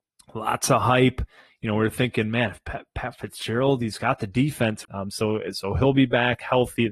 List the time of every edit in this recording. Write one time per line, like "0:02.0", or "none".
0:04.8